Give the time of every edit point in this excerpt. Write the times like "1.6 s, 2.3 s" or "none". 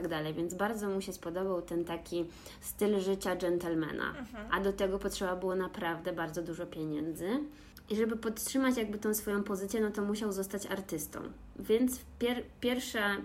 none